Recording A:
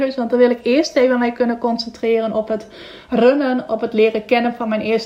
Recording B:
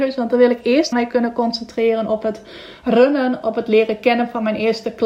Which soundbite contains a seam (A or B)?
B